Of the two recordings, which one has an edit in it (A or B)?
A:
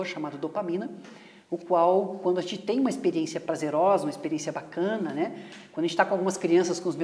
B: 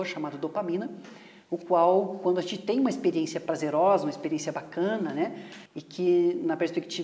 B